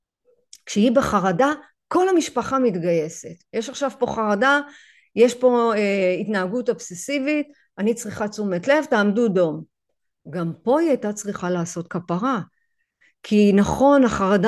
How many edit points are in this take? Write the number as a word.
one